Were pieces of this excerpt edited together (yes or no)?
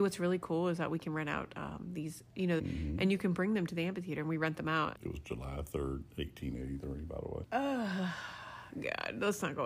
yes